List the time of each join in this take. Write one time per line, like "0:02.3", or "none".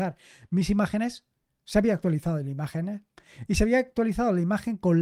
none